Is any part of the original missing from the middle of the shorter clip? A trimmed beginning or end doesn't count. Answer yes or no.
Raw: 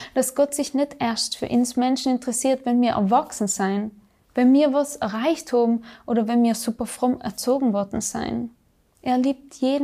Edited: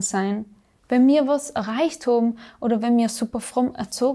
no